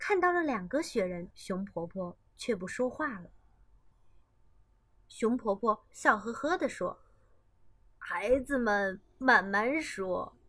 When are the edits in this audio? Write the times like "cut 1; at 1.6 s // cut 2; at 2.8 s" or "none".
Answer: cut 1; at 1.3 s // cut 2; at 3.9 s